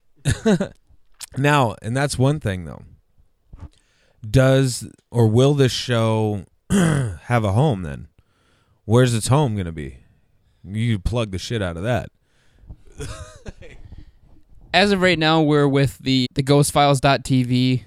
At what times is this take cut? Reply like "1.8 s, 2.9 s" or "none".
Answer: 16.2 s